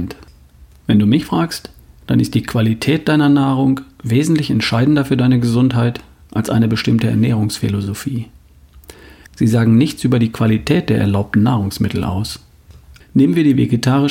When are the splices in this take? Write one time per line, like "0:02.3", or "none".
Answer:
0:09.3
0:13.0